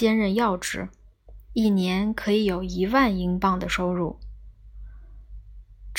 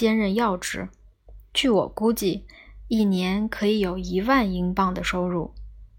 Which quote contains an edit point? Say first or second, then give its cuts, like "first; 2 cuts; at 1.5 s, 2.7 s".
first; 1 cut; at 1.5 s